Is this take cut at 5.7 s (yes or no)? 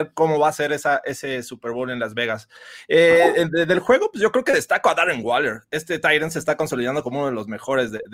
no